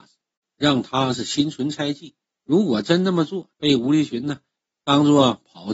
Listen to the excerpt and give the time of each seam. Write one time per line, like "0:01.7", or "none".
0:02.3
0:03.5